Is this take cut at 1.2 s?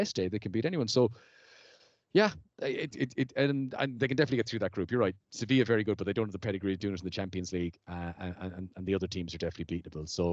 no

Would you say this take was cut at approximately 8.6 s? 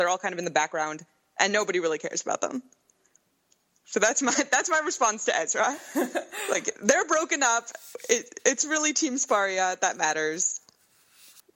no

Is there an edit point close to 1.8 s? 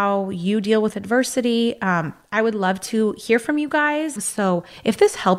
no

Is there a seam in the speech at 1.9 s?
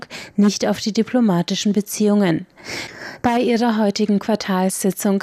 no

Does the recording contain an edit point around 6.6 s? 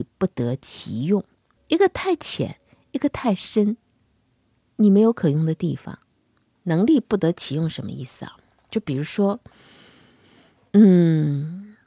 yes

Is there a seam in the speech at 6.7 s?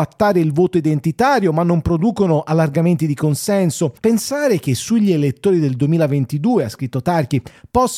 no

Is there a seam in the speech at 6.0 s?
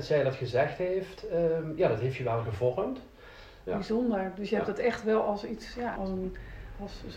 yes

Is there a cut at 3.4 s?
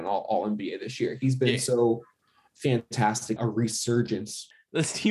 yes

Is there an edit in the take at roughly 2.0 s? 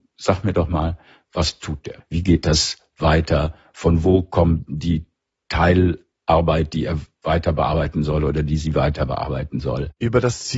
yes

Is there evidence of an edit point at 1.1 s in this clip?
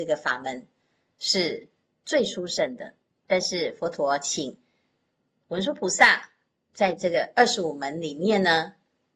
no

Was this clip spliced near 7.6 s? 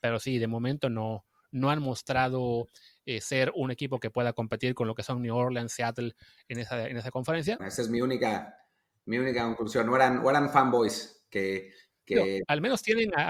yes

